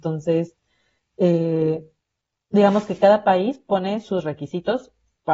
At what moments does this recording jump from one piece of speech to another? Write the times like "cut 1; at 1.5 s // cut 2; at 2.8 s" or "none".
none